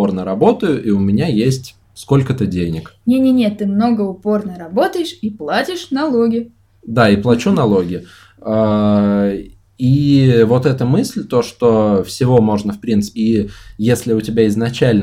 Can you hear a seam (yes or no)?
yes